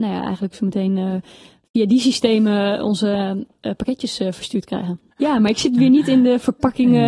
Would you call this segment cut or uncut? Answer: cut